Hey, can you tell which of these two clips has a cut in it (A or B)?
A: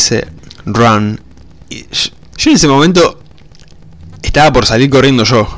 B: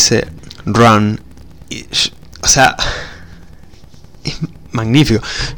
A